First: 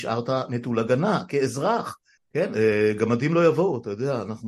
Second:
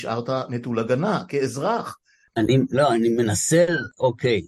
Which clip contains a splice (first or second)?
first